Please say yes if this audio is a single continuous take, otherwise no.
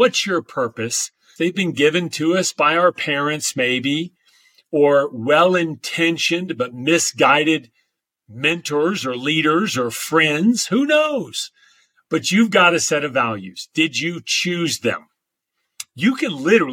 no